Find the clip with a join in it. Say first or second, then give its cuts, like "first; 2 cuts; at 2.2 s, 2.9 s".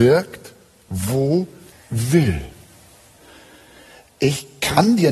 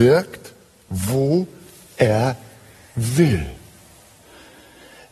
first; 1 cut; at 1.7 s